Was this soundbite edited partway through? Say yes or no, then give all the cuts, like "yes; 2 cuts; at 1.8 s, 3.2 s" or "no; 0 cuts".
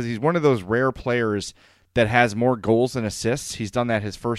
no; 0 cuts